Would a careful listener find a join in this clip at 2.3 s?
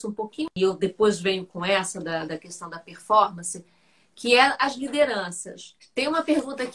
yes; 2 cuts; at 2.3 s, 5.8 s

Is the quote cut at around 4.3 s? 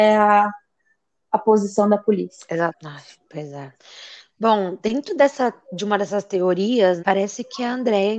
no; 2 cuts; at 2.7 s, 7.0 s

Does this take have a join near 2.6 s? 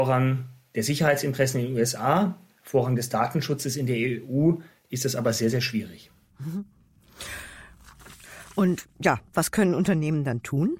no; 0 cuts

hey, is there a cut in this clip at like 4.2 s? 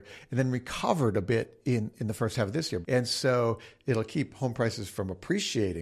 no; 1 cut; at 2.8 s

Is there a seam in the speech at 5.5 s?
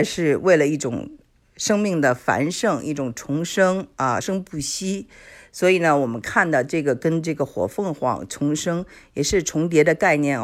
no; 1 cut; at 4.2 s

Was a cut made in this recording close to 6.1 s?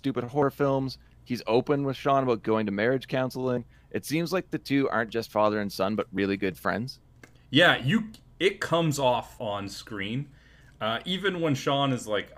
no; 1 cut; at 9.4 s

